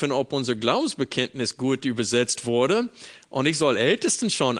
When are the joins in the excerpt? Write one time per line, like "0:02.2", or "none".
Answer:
none